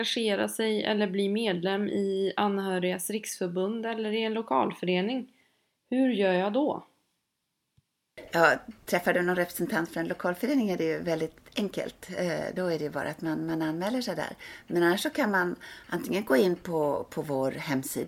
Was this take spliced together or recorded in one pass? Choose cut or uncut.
uncut